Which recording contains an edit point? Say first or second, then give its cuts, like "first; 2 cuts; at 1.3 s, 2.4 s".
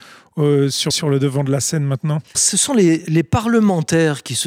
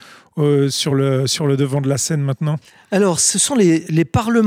first; 2 cuts; at 0.9 s, 2.3 s